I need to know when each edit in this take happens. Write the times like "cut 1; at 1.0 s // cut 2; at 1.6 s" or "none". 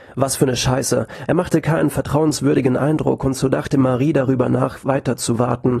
cut 1; at 1.3 s